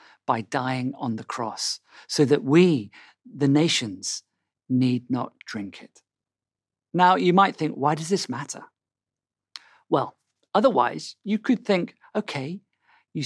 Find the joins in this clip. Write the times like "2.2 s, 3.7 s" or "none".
none